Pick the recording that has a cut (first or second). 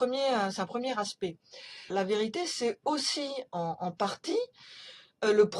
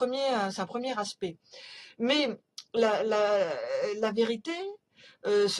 first